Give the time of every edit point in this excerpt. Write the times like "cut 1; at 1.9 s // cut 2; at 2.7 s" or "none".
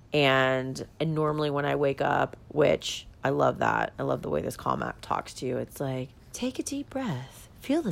cut 1; at 1.0 s // cut 2; at 2.4 s // cut 3; at 6.2 s